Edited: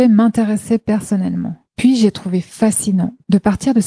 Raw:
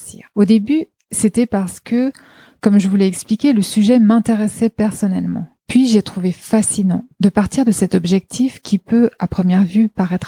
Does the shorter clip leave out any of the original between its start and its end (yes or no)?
no